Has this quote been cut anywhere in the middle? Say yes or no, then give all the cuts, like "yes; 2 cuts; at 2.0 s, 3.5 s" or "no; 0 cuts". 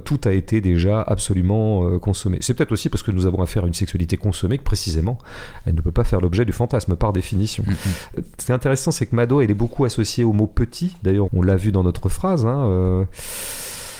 yes; 1 cut; at 11.3 s